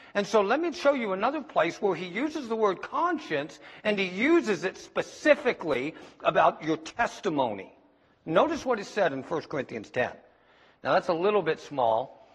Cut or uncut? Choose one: uncut